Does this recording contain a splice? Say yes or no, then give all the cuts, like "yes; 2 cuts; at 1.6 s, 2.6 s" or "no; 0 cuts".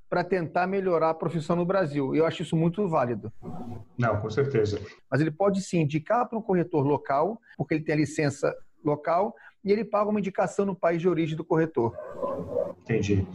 yes; 2 cuts; at 5.0 s, 7.5 s